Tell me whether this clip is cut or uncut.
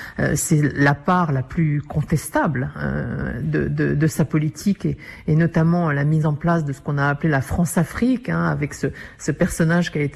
uncut